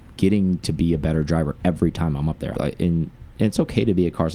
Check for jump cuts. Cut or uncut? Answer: cut